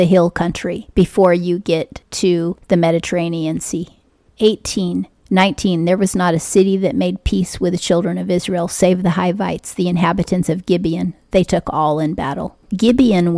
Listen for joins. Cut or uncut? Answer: cut